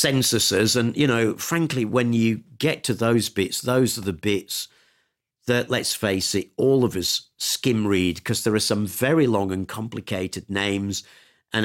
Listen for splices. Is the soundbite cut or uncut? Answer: uncut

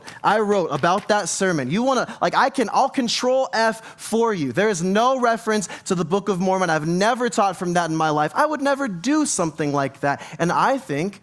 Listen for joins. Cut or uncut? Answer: uncut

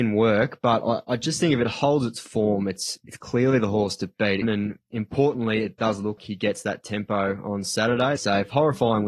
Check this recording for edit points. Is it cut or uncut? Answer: cut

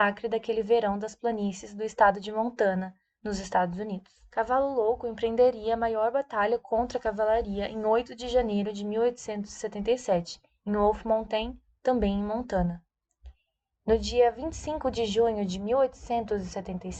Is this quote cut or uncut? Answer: cut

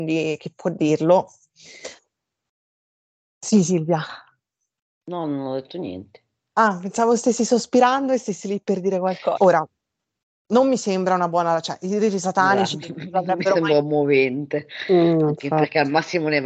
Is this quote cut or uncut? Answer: cut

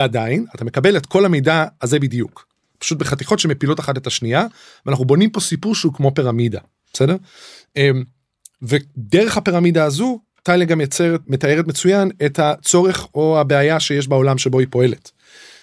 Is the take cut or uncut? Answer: cut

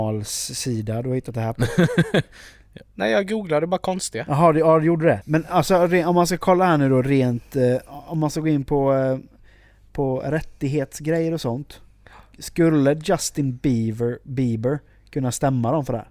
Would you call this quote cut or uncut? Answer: cut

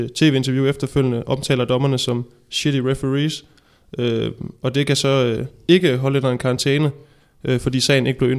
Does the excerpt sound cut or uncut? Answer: uncut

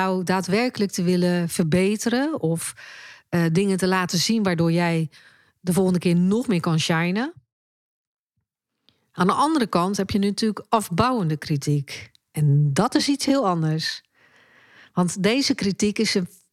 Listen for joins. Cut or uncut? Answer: uncut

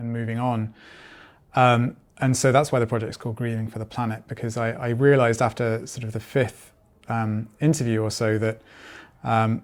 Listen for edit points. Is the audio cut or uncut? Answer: uncut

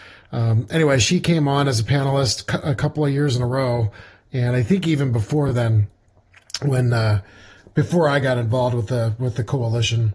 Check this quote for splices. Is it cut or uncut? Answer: uncut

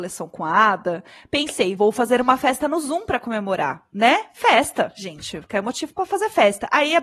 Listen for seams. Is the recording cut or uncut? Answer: uncut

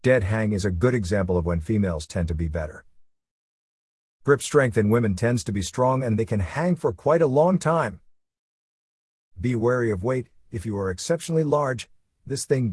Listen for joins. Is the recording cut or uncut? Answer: uncut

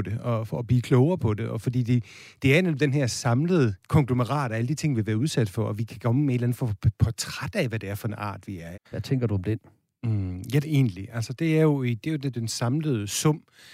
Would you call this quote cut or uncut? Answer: cut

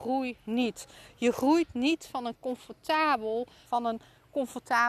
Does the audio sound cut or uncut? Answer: cut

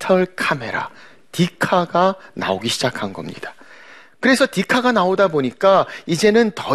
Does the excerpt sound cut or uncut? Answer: uncut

